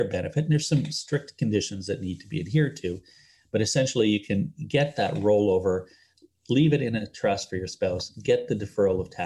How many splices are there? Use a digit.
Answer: 0